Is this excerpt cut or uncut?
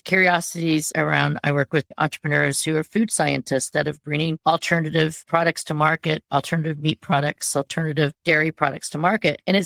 uncut